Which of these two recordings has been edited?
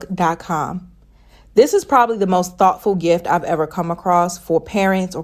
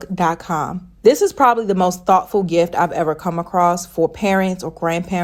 second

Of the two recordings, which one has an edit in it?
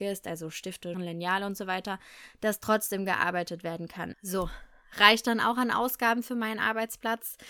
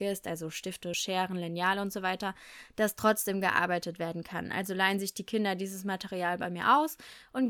first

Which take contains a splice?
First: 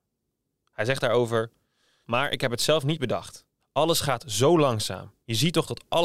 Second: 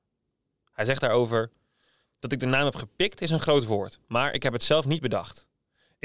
first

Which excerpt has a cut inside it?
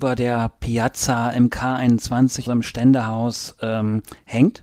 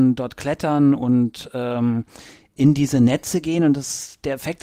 first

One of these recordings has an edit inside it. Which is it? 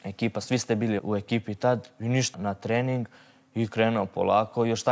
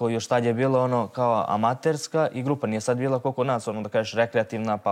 first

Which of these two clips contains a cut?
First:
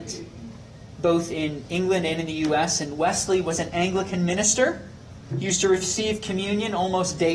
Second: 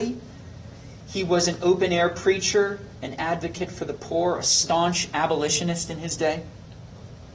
first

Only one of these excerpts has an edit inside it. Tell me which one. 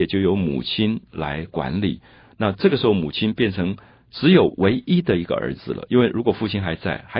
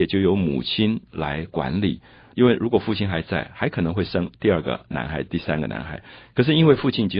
second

